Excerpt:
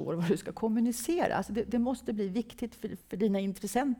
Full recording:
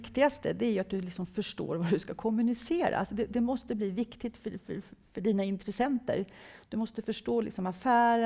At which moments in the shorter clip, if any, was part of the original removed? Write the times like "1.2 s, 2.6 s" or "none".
3.0 s